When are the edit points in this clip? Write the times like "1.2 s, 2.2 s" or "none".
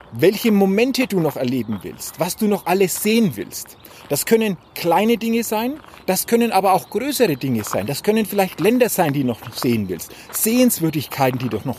none